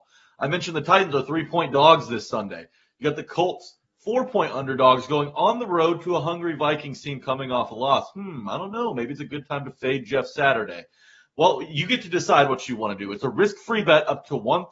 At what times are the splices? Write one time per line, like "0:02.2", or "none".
none